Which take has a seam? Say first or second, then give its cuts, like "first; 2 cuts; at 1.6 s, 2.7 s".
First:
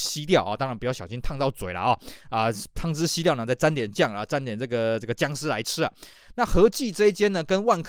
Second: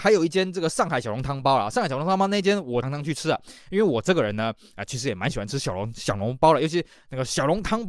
second; 1 cut; at 2.8 s